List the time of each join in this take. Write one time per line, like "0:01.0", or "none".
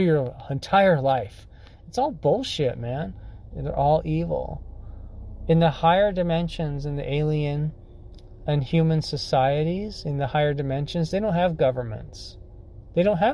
0:03.5